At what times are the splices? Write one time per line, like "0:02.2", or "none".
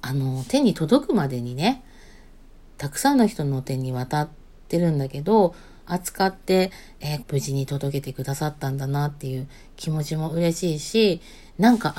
0:02.7
0:05.8
0:07.2